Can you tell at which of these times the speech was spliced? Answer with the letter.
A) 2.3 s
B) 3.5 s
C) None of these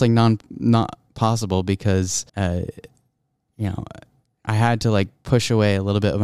A